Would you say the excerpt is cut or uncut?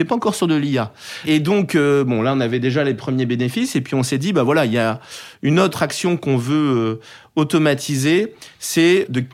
uncut